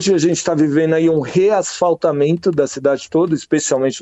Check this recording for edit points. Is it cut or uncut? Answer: uncut